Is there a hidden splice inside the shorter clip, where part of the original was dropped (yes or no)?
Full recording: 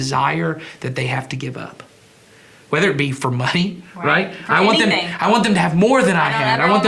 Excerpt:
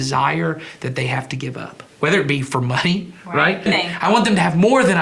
yes